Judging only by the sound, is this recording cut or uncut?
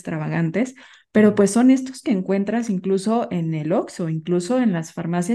uncut